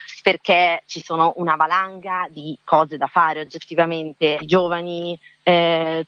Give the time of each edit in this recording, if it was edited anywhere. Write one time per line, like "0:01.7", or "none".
0:04.4